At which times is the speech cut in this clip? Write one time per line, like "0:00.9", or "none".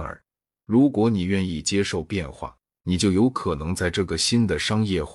0:02.8